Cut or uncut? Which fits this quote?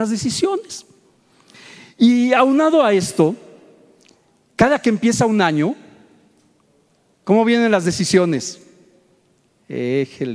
uncut